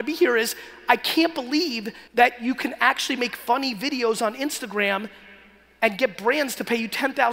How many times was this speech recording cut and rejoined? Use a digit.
1